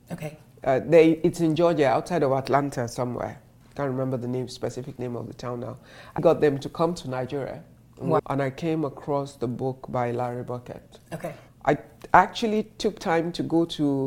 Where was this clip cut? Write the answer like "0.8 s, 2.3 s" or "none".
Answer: 6.2 s, 8.2 s, 11.5 s